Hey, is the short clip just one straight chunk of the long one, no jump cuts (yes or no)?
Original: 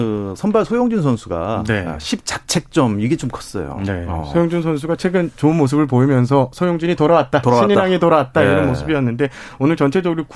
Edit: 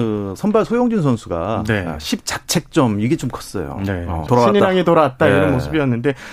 no